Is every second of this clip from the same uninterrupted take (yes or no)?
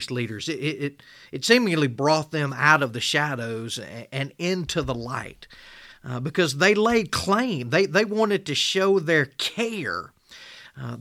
yes